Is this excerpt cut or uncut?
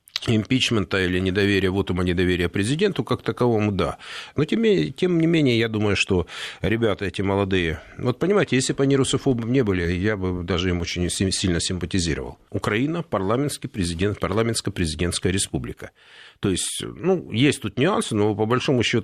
cut